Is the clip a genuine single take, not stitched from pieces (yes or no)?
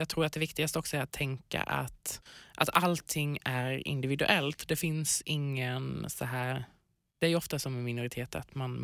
yes